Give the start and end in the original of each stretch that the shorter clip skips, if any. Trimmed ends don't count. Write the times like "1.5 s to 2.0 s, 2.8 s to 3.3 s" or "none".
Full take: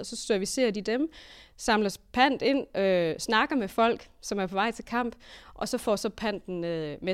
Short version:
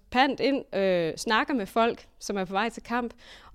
none